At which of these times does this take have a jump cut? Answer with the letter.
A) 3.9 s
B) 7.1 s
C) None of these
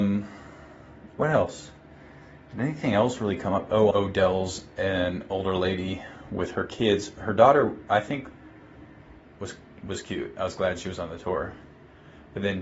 A